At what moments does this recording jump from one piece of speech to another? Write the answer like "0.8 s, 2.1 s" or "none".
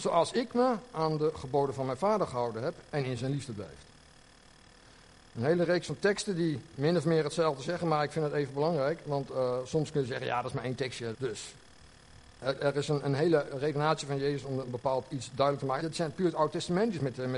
11.1 s, 15.8 s